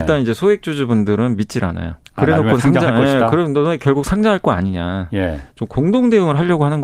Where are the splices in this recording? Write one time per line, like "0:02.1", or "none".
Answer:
0:02.0
0:05.5